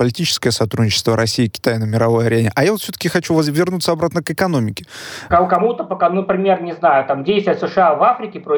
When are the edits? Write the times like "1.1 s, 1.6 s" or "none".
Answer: 5.3 s

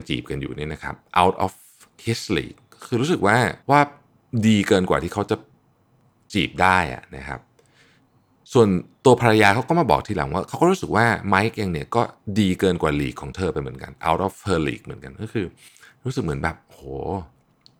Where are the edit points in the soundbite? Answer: 2.0 s, 3.6 s

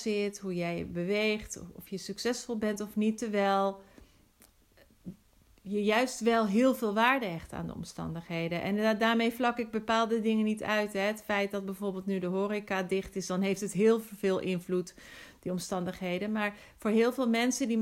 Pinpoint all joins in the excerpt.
none

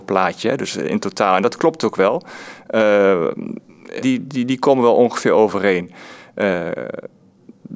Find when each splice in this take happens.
4.0 s

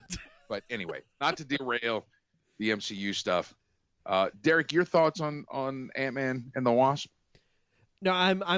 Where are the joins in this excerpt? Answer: none

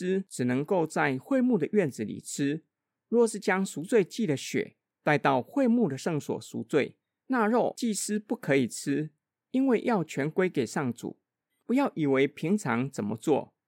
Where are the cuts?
11.5 s

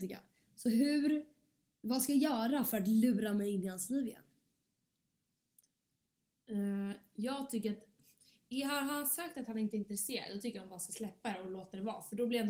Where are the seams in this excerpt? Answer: none

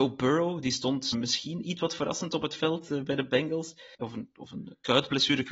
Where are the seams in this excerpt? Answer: 1.1 s, 3.9 s

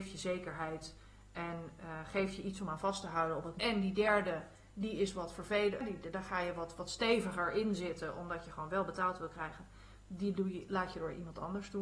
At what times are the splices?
3.6 s

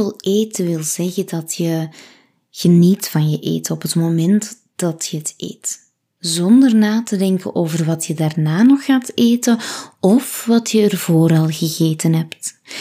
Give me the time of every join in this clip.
none

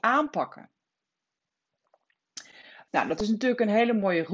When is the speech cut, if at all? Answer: 2.9 s

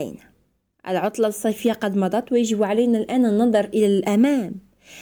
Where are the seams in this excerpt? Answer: none

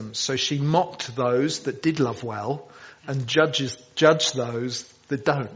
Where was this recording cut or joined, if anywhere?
none

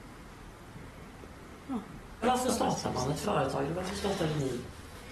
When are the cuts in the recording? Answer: 2.2 s

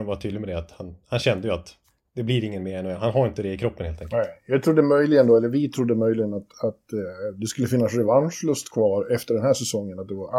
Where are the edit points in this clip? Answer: none

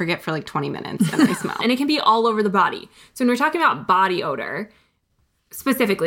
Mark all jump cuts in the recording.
1.6 s

